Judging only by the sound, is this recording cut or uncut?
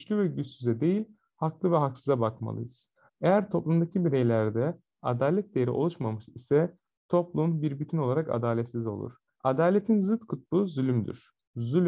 cut